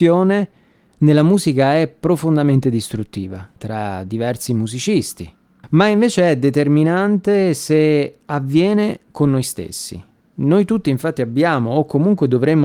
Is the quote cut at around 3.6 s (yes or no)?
yes